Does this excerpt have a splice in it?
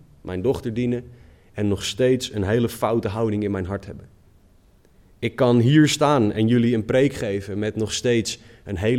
no; 0 cuts

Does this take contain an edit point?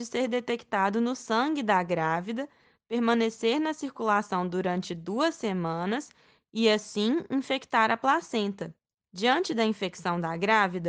no; 0 cuts

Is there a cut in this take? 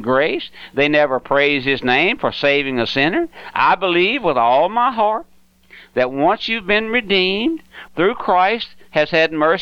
yes; 1 cut; at 7.9 s

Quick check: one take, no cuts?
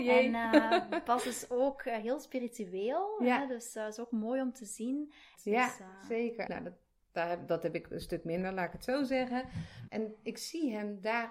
no; 3 cuts; at 5.4 s, 6.5 s, 9.9 s

